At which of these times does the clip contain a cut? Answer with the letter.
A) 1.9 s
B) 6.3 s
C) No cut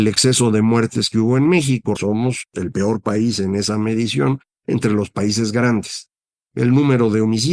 A